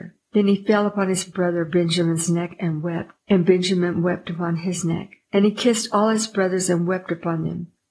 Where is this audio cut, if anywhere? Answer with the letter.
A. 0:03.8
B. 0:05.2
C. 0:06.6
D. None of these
D